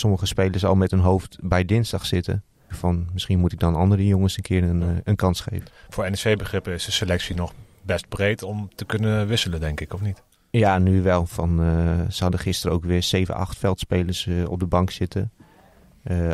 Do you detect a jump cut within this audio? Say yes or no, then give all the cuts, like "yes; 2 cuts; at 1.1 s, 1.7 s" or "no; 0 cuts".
yes; 1 cut; at 2.7 s